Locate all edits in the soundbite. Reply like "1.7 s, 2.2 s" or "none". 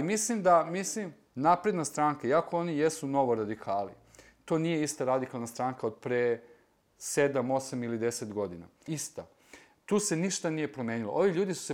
8.9 s

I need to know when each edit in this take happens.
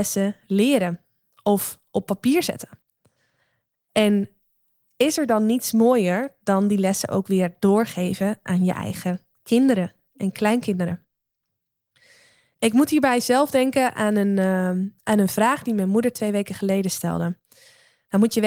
none

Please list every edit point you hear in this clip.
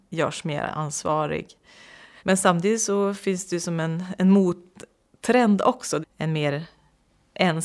2.2 s, 6.0 s

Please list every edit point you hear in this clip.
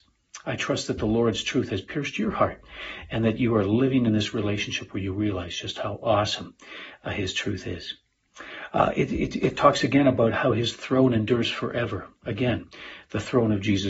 none

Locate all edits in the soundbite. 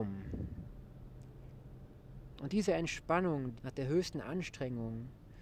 2.4 s, 3.6 s

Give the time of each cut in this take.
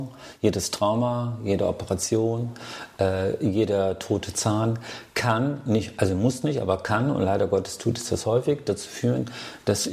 none

